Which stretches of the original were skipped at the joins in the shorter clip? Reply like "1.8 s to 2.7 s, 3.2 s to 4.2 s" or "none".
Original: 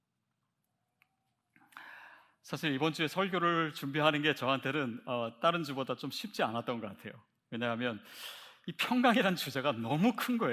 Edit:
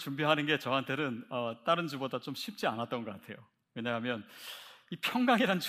none